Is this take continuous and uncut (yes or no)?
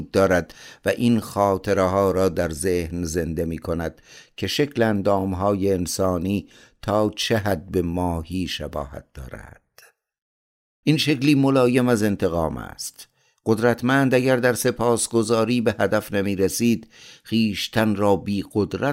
no